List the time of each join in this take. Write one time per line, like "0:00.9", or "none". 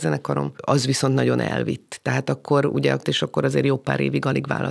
0:03.0

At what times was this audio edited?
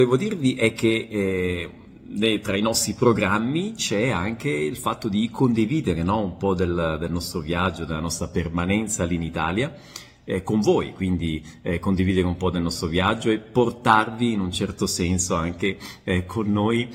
none

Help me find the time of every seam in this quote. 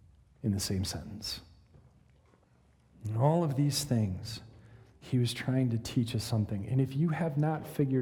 none

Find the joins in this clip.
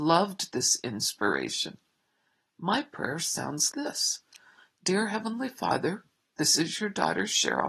0:03.7

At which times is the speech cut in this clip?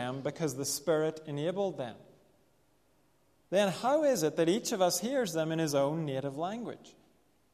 0:03.5

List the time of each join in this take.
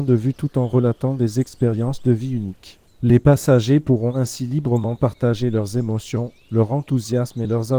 0:02.9

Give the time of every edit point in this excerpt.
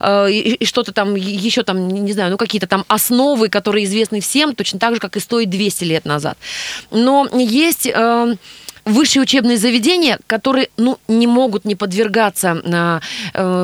0:08.8

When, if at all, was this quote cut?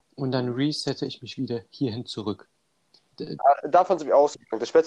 0:03.1

